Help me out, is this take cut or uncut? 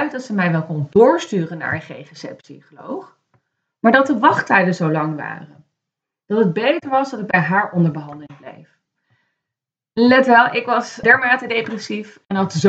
cut